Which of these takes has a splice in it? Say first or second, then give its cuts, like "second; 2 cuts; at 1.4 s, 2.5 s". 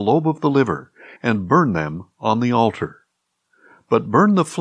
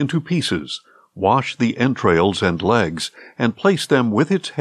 first; 1 cut; at 1.2 s